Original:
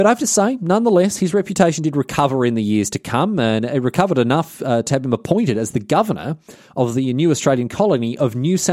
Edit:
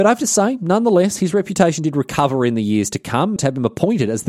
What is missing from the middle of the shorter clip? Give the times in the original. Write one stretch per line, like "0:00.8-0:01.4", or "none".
0:03.4-0:04.8